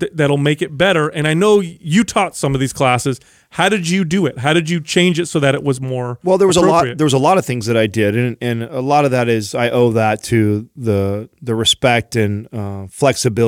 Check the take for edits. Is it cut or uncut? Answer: uncut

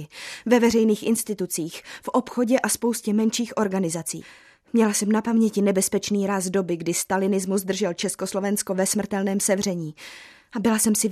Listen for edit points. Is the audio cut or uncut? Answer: uncut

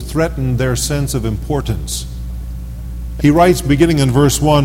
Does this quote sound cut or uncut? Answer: cut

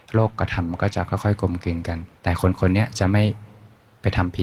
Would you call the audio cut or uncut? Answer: cut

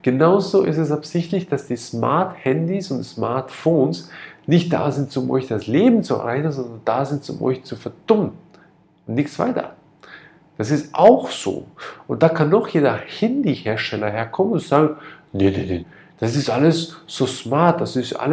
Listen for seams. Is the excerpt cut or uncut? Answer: cut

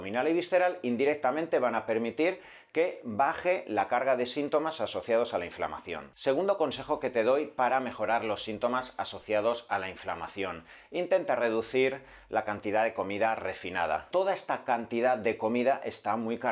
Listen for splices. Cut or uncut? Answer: cut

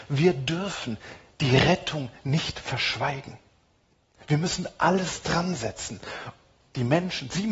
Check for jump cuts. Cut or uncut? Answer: cut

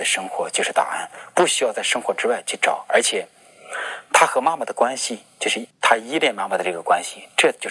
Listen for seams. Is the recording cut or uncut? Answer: uncut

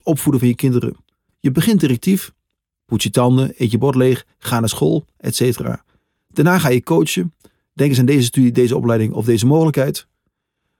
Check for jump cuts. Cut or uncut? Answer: uncut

